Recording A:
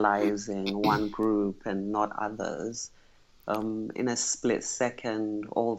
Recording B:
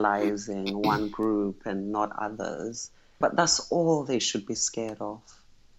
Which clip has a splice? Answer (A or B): B